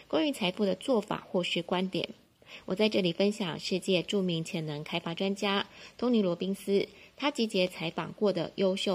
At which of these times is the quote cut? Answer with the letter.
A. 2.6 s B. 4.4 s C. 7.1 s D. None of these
D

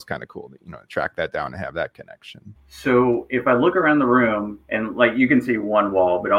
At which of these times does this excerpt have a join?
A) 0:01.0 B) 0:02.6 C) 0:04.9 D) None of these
B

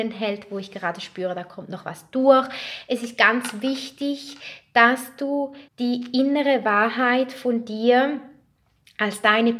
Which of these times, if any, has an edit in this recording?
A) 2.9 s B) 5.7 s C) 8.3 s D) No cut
B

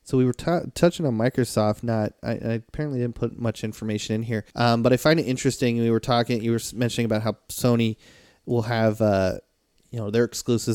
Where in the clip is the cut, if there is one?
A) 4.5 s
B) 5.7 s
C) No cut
A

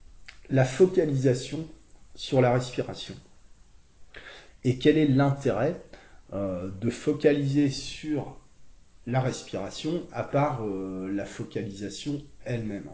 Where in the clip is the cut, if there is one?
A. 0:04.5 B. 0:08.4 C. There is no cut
A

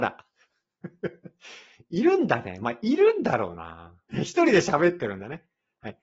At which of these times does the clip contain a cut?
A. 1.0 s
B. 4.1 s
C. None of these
B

